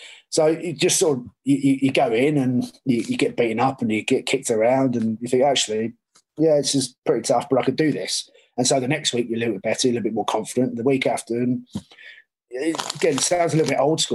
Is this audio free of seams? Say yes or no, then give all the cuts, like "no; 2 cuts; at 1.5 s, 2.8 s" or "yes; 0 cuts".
yes; 0 cuts